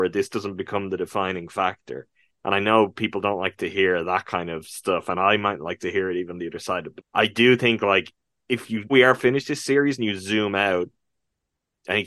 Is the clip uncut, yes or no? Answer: no